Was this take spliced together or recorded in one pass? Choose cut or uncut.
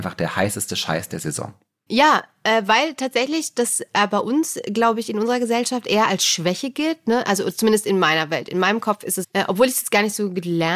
cut